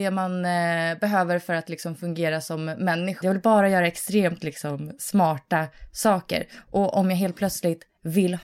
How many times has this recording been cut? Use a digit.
1